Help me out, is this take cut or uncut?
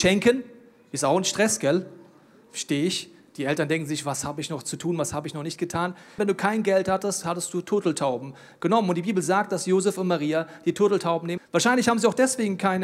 cut